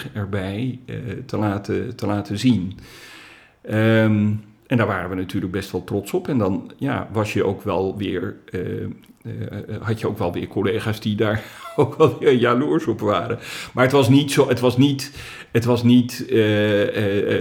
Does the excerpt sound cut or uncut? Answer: uncut